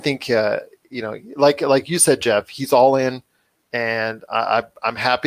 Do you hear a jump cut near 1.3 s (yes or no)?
no